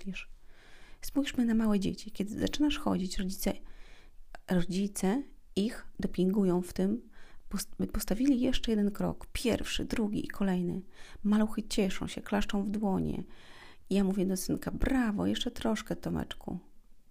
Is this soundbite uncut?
yes; 0 cuts

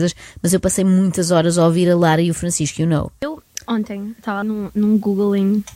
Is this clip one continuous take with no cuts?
no; 1 cut; at 4.4 s

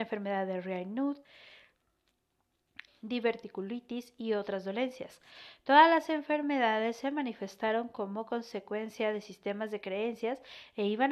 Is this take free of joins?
no; 1 cut; at 2.9 s

